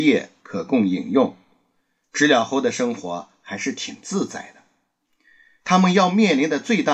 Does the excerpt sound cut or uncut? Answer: uncut